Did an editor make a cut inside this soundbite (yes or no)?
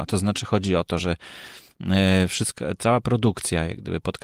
no